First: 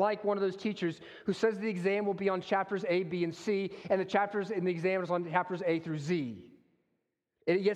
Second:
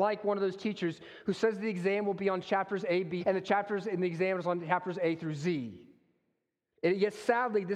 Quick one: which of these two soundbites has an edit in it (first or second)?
second